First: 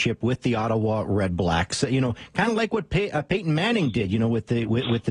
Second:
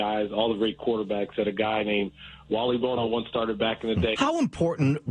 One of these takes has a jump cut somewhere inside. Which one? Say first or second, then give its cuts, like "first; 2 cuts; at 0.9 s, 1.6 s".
second; 1 cut; at 4.1 s